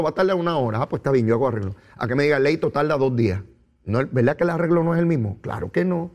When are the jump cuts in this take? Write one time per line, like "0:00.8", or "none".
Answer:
none